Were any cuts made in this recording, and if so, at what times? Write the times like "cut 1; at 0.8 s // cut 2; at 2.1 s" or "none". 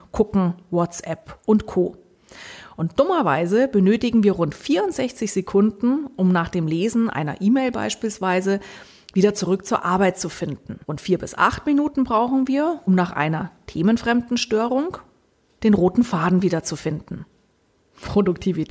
cut 1; at 10.8 s // cut 2; at 12.9 s // cut 3; at 15.6 s